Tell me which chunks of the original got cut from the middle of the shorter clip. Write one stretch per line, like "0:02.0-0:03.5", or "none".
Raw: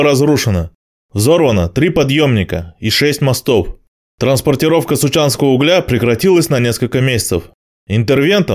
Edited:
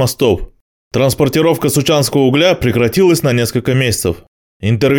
none